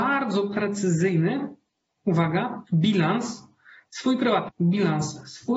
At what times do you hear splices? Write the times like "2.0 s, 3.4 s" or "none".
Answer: 2.7 s, 4.5 s